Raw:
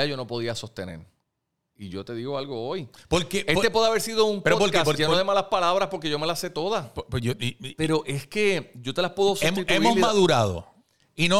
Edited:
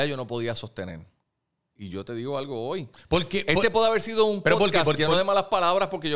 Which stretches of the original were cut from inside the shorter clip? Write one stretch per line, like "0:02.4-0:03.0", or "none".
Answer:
none